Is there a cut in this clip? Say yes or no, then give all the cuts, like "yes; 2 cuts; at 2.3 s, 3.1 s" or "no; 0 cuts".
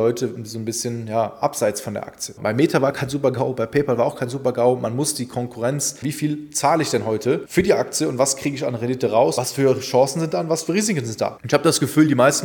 yes; 2 cuts; at 2.4 s, 6.0 s